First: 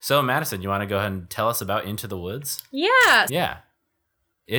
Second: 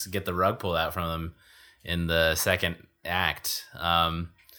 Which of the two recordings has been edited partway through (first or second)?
first